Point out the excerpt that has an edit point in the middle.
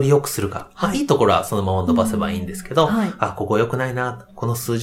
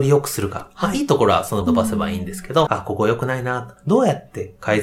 second; 3 cuts; at 1.6 s, 2.7 s, 3.8 s

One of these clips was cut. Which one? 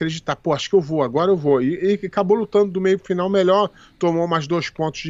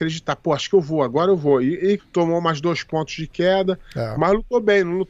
second; 1 cut; at 2.0 s

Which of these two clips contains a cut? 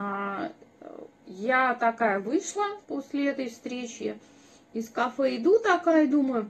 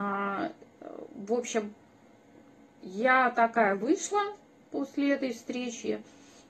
first; 2 cuts; at 1.1 s, 2.8 s

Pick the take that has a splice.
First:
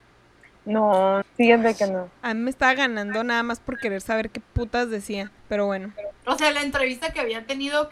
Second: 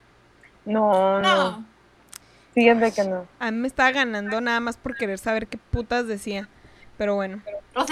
first; 2 cuts; at 1.2 s, 5.4 s

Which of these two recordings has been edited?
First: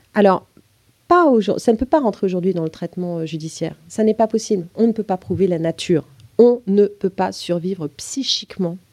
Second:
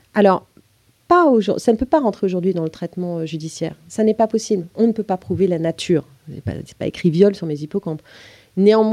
first; 1 cut; at 6.2 s

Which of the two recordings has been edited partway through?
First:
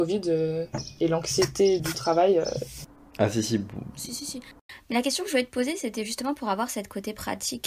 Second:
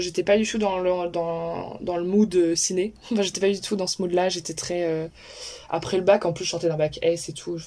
first; 1 cut; at 1.8 s

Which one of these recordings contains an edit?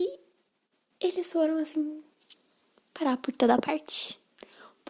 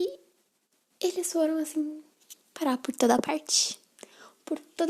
second; 1 cut; at 2.4 s

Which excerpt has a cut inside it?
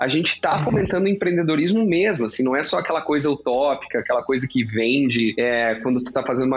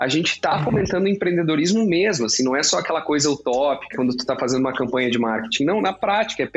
second; 1 cut; at 3.9 s

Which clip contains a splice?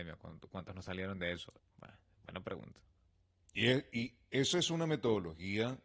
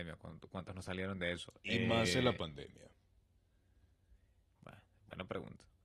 first; 1 cut; at 1.6 s

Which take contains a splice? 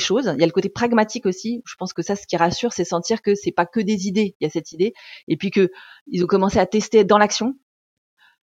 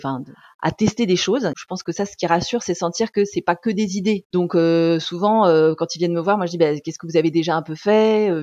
second; 2 cuts; at 1.5 s, 4.3 s

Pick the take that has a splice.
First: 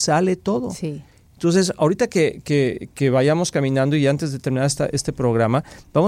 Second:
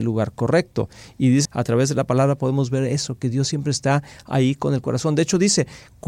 second; 1 cut; at 1.5 s

